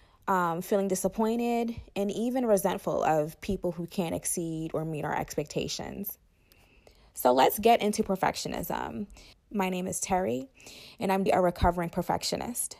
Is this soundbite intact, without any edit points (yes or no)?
no